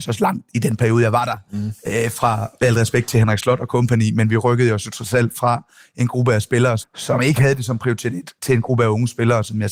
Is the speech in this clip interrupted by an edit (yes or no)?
yes